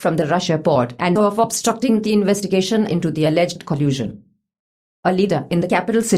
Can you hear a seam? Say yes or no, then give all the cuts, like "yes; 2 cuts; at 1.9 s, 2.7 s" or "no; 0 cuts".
yes; 1 cut; at 1.2 s